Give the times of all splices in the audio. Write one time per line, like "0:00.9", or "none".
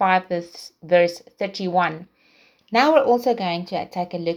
0:02.6